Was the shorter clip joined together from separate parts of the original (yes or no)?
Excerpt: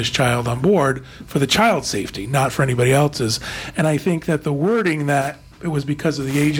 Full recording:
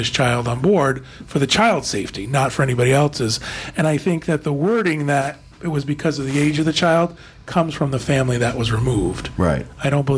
no